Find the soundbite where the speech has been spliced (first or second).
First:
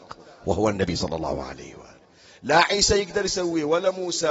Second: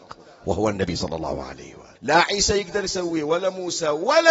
second